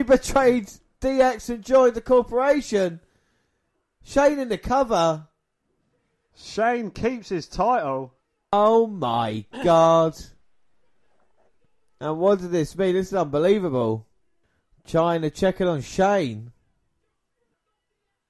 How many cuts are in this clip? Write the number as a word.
zero